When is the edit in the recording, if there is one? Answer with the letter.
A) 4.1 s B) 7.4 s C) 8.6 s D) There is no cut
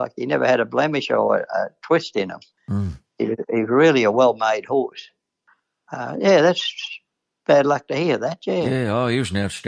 D